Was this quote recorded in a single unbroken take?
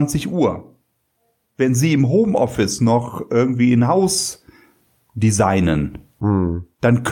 yes; 0 cuts

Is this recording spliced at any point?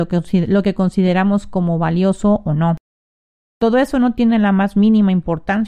yes; 1 cut; at 3.4 s

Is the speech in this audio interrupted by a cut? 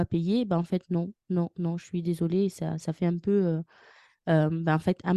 no; 0 cuts

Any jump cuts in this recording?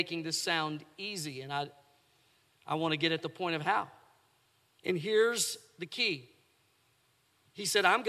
yes; 1 cut; at 4.8 s

